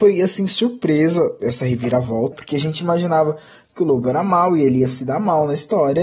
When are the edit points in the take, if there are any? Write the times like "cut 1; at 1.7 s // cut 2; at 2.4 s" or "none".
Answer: cut 1; at 2.3 s